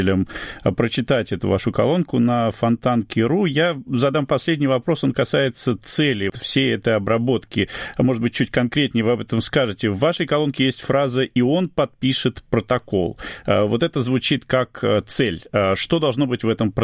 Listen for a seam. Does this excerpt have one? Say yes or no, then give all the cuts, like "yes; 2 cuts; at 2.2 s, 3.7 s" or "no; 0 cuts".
yes; 1 cut; at 6.3 s